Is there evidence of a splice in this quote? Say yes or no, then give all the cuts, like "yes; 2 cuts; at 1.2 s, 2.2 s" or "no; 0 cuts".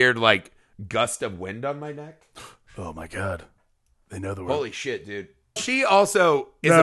yes; 1 cut; at 5.6 s